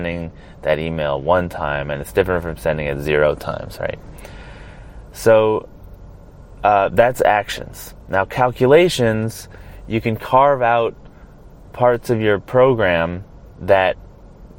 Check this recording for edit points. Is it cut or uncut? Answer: uncut